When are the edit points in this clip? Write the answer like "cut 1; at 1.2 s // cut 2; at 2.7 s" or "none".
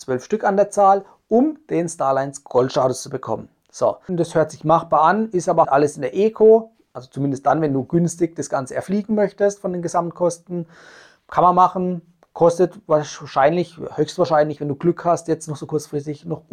cut 1; at 4.1 s // cut 2; at 5.6 s